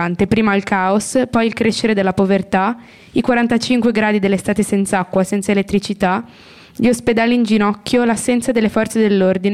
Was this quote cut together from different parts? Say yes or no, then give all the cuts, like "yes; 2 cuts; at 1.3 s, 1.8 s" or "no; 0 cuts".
no; 0 cuts